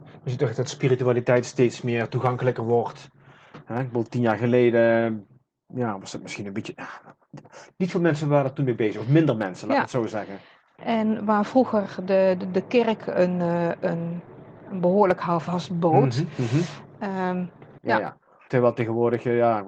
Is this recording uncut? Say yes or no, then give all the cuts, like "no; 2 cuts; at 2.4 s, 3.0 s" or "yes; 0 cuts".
no; 2 cuts; at 10.8 s, 17.8 s